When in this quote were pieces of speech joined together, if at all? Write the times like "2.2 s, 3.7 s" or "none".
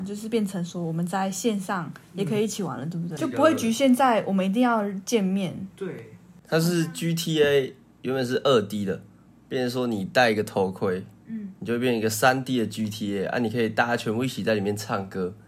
3.2 s

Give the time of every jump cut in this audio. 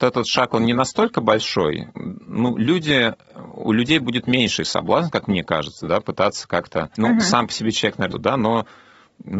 7.0 s, 8.1 s

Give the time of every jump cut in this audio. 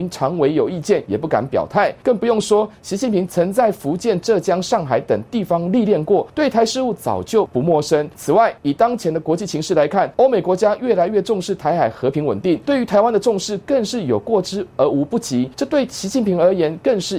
none

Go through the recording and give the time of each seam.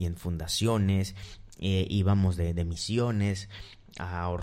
none

